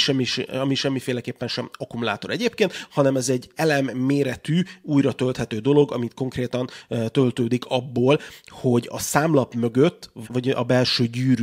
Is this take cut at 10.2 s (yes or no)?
yes